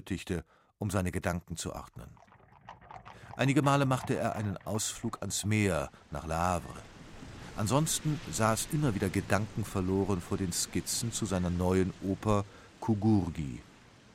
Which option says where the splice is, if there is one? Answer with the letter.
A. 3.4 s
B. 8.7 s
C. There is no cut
B